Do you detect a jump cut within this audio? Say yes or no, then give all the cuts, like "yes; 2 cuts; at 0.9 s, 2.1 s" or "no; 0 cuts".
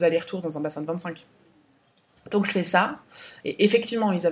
yes; 1 cut; at 3.4 s